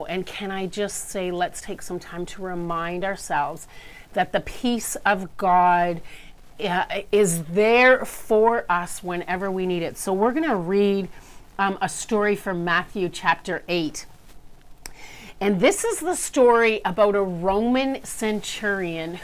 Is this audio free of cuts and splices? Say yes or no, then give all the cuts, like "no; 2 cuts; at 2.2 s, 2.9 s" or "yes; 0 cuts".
no; 1 cut; at 1.6 s